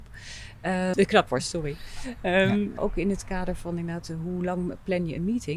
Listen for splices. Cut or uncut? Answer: cut